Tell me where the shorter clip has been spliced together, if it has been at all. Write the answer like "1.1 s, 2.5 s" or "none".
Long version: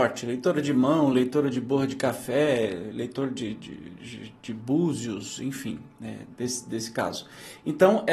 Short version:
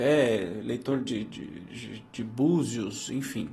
none